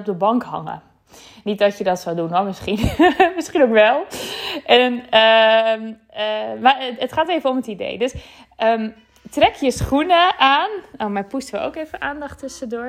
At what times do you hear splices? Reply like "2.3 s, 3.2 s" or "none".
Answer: none